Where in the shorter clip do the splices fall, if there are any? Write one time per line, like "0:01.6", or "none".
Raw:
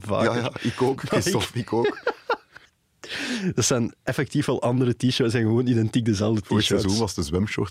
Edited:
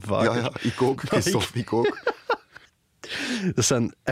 none